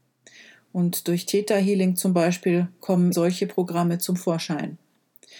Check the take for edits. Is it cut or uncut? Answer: cut